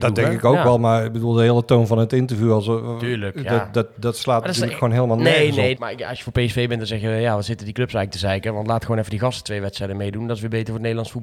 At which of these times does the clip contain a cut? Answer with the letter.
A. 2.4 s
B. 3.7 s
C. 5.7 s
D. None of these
C